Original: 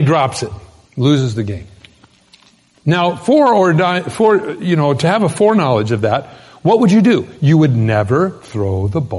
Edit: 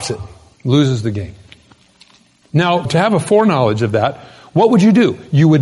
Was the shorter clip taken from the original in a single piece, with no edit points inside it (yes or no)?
no